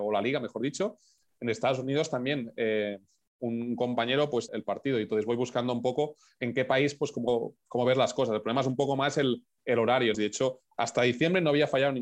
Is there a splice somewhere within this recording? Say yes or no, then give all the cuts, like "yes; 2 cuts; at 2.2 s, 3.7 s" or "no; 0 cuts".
yes; 2 cuts; at 4.5 s, 10.1 s